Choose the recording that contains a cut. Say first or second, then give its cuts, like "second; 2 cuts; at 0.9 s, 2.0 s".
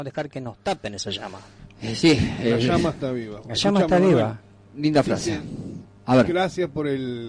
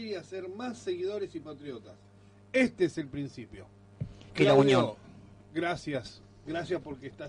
second; 1 cut; at 4.3 s